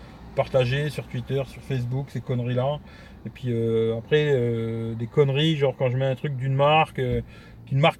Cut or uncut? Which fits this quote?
uncut